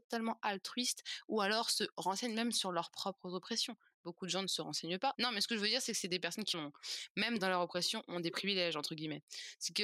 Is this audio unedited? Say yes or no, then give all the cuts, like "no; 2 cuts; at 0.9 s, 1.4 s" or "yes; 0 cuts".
no; 2 cuts; at 5.1 s, 6.5 s